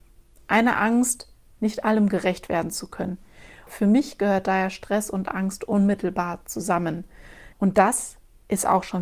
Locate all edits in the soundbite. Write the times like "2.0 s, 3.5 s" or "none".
3.7 s, 7.5 s